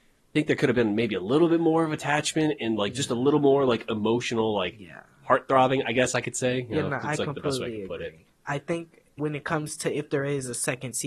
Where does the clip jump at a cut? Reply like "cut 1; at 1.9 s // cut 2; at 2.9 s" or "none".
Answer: cut 1; at 9.2 s